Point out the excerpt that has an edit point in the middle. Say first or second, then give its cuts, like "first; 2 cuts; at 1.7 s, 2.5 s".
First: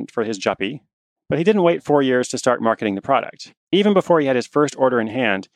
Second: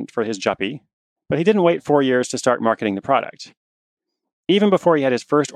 first; 1 cut; at 3.6 s